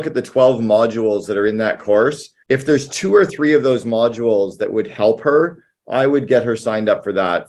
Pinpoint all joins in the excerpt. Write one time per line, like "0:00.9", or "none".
0:02.4